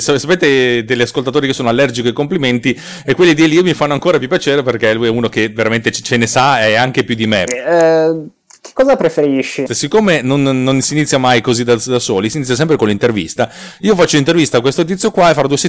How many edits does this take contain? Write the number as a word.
two